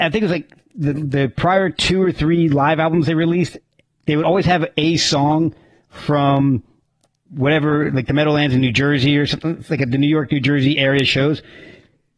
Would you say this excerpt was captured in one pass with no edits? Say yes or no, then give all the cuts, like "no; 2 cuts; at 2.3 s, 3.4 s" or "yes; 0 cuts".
yes; 0 cuts